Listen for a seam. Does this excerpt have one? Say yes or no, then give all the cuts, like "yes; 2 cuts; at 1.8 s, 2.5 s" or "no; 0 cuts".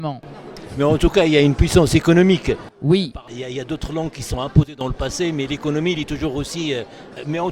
no; 0 cuts